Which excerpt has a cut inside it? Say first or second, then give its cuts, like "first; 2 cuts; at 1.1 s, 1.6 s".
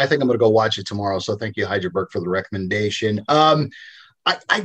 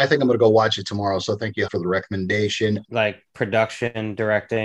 second; 2 cuts; at 1.7 s, 2.8 s